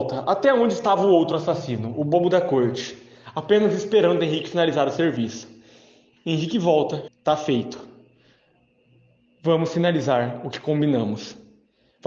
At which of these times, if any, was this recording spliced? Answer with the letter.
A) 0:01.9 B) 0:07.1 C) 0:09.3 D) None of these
B